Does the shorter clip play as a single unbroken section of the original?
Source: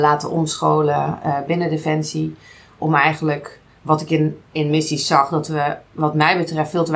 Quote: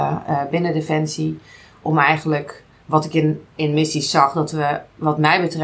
yes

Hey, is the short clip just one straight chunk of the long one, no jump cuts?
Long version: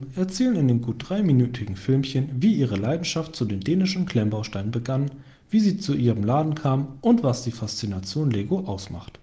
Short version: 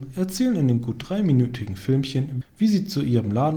no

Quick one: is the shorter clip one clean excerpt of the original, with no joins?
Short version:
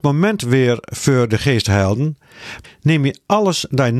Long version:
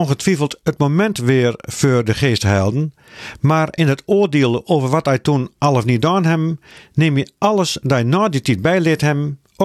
no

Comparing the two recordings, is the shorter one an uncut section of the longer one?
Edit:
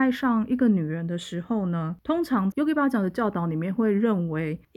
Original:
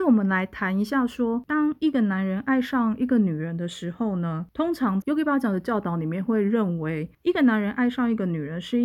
yes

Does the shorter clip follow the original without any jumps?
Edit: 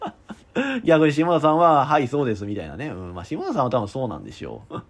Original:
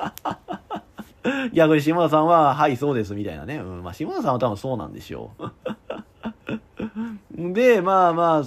yes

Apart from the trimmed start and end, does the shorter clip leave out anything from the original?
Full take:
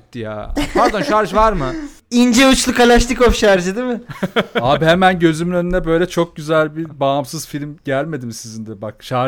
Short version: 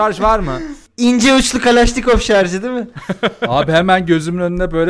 no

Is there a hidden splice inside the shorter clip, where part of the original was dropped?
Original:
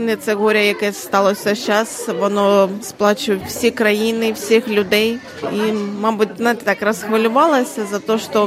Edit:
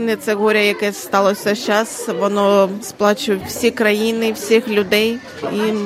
no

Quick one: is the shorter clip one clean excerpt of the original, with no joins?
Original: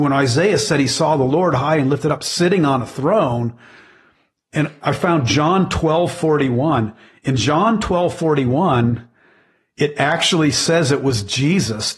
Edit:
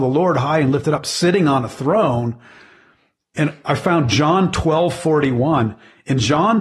yes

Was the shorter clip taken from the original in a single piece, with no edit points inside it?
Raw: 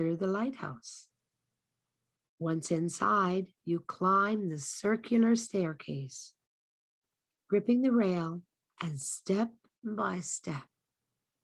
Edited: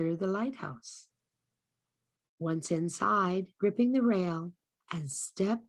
no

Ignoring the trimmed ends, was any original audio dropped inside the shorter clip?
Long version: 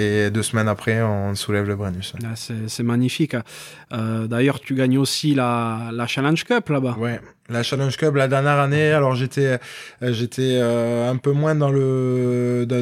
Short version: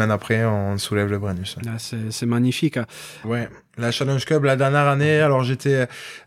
yes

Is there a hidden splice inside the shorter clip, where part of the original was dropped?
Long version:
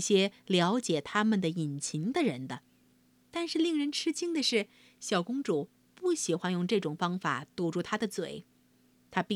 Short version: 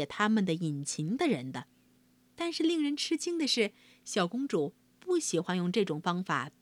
no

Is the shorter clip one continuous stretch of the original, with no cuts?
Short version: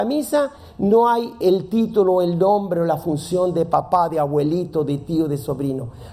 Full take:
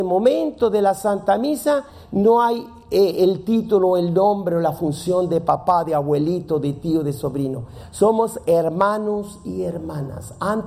no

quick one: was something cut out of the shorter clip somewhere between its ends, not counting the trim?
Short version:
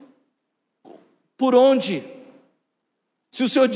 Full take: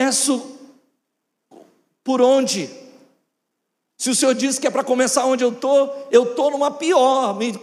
no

